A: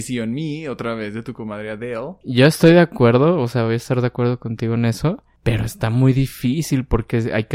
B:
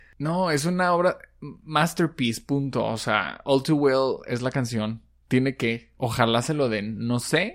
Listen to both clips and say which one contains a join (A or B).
A